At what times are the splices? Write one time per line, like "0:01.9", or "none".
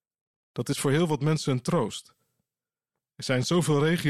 none